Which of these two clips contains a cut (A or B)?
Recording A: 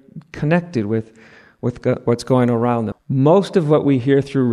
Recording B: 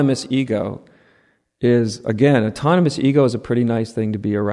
A